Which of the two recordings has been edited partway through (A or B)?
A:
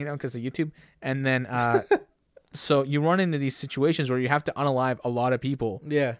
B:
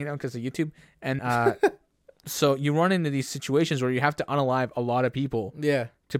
B